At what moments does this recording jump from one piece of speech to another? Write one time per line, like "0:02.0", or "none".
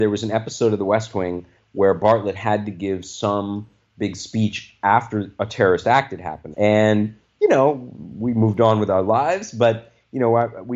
0:06.5